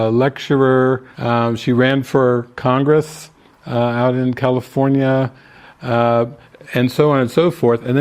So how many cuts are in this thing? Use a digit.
1